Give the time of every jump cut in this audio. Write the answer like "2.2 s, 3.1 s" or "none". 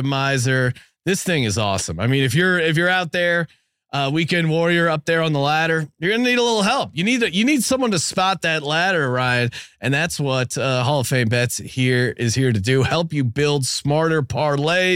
none